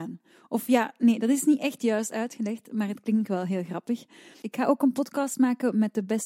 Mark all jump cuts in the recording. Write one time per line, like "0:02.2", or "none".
0:04.4